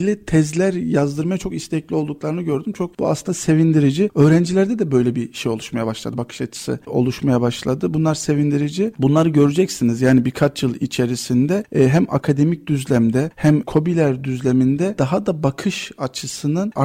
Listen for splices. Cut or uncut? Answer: uncut